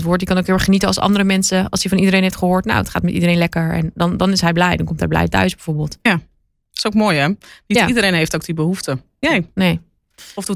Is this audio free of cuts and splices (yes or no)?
no